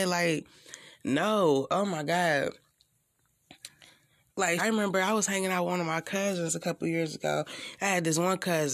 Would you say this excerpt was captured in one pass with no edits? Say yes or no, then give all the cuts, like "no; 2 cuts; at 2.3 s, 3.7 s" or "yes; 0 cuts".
no; 1 cut; at 4.6 s